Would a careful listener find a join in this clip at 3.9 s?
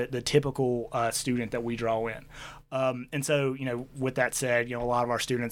no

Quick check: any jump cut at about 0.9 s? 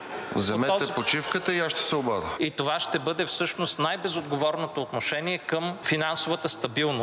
no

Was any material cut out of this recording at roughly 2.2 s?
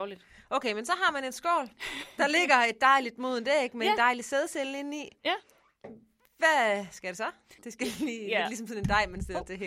no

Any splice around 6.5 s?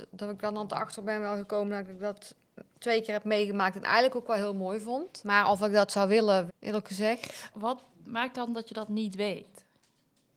yes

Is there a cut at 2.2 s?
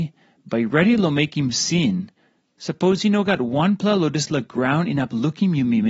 no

